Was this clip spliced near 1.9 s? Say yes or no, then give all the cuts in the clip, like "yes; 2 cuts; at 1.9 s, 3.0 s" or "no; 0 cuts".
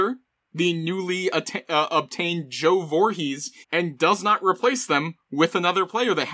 no; 1 cut; at 3.6 s